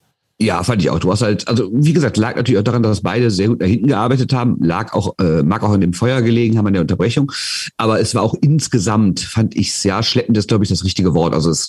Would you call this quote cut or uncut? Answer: uncut